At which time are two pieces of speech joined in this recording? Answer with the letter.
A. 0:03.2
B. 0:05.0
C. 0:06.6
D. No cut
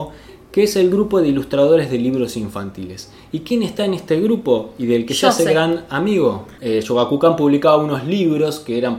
C